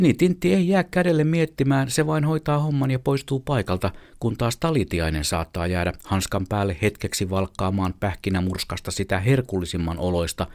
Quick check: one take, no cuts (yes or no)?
yes